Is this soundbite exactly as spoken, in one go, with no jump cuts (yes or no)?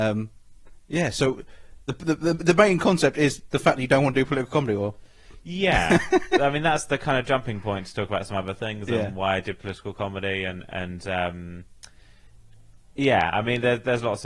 yes